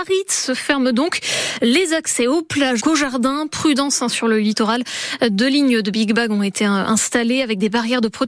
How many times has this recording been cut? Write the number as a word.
one